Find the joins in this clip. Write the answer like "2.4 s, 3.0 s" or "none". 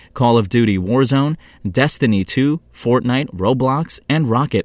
none